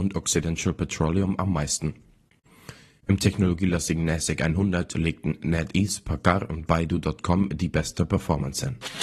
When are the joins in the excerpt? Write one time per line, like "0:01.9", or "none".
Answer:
none